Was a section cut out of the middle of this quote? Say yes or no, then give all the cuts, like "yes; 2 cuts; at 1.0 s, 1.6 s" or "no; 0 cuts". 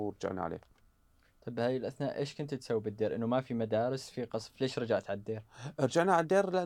no; 0 cuts